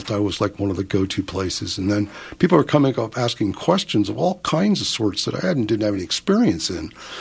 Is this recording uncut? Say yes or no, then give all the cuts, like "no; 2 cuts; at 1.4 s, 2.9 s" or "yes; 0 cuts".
yes; 0 cuts